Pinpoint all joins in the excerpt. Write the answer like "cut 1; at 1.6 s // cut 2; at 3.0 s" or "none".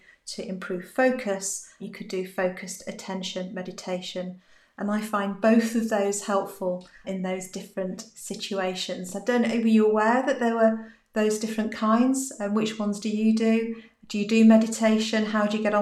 none